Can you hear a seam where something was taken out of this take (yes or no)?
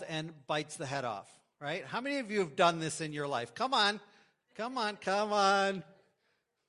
no